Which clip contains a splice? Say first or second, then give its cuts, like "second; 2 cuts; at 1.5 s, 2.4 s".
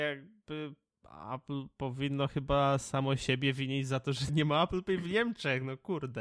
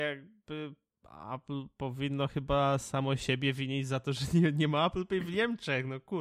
first; 1 cut; at 4.3 s